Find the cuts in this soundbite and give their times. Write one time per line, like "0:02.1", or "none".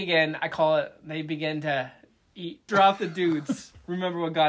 0:02.7